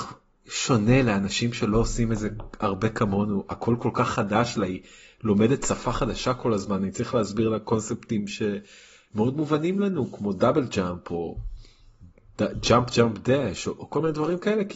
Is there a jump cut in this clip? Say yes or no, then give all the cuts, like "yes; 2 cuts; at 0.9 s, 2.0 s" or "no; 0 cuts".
no; 0 cuts